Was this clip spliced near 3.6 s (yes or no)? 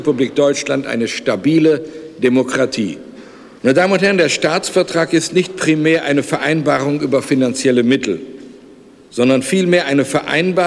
yes